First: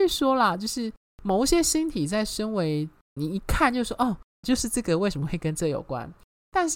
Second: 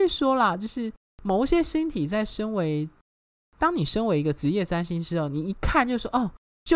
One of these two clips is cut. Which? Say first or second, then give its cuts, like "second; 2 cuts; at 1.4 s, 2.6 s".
first; 2 cuts; at 3.2 s, 4.4 s